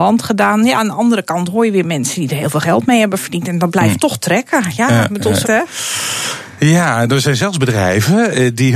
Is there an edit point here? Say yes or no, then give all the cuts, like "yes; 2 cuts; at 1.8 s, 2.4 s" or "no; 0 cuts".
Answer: yes; 1 cut; at 5.4 s